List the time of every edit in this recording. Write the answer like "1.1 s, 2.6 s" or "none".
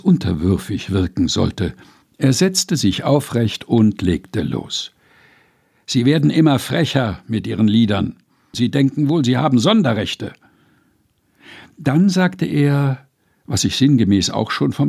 2.0 s, 8.5 s